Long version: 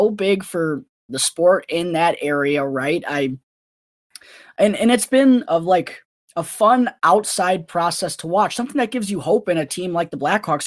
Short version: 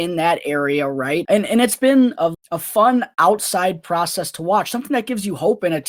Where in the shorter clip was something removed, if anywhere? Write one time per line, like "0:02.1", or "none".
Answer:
0:01.2
0:02.3